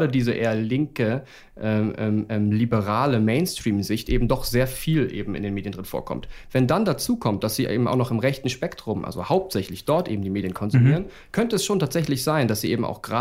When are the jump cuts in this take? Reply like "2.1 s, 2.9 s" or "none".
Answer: none